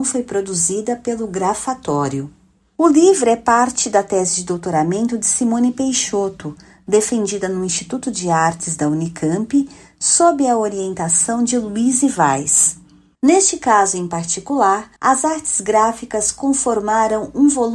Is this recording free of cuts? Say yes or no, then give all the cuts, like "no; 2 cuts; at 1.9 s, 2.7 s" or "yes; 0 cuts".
no; 2 cuts; at 13.1 s, 15.0 s